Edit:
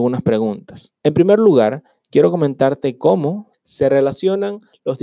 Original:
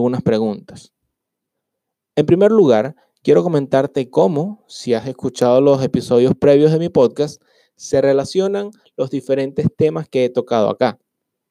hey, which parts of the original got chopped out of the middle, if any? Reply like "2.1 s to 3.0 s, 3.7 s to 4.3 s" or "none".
0.9 s to 2.1 s, 4.7 s to 7.7 s